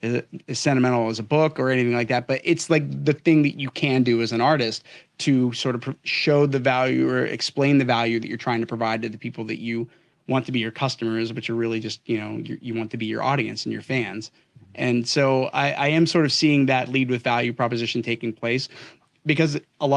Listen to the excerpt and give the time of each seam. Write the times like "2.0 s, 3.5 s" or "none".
none